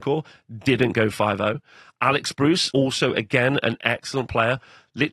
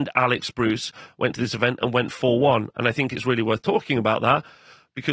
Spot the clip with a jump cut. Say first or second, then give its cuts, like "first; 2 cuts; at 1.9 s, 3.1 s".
first; 1 cut; at 2.7 s